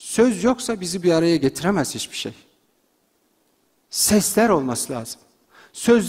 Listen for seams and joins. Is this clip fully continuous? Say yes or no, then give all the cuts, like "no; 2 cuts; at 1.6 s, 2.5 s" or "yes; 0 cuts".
yes; 0 cuts